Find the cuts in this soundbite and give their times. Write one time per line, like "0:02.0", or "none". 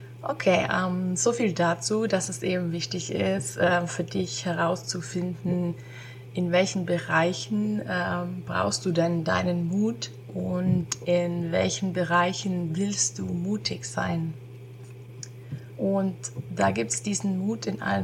none